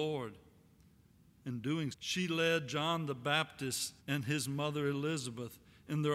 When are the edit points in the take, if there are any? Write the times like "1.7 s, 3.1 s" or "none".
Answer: 1.9 s, 4.0 s